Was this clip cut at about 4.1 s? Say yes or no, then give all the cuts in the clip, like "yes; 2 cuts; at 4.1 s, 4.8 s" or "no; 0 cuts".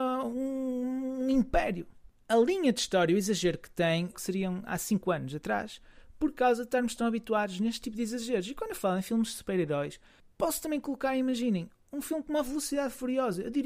yes; 1 cut; at 4.1 s